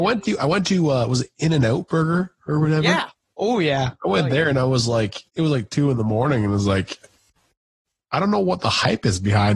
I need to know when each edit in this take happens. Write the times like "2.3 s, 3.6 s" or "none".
5.3 s